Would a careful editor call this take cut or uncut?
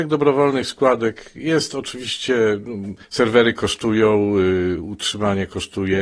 cut